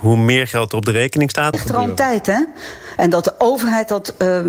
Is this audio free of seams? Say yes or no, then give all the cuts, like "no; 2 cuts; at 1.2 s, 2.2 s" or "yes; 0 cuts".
no; 2 cuts; at 1.5 s, 3.0 s